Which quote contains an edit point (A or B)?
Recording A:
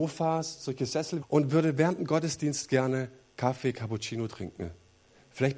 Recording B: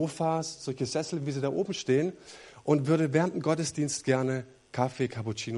A